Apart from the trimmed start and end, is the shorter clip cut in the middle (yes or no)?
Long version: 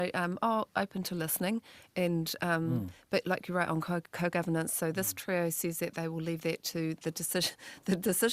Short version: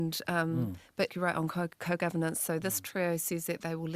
yes